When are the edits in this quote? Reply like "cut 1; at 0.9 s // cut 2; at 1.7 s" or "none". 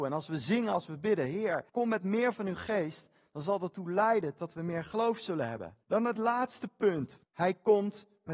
cut 1; at 1.7 s // cut 2; at 5.8 s // cut 3; at 7.2 s